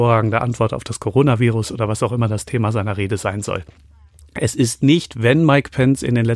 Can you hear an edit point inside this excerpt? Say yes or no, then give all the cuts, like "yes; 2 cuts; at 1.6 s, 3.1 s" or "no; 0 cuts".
no; 0 cuts